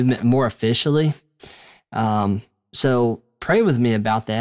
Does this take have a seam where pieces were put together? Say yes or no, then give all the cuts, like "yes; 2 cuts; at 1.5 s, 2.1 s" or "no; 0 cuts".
no; 0 cuts